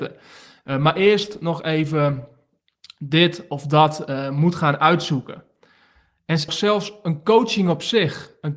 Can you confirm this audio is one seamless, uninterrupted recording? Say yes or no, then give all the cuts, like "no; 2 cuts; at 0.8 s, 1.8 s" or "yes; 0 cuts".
no; 1 cut; at 6.5 s